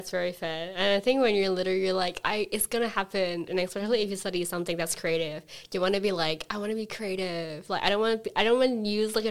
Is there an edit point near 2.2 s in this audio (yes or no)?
yes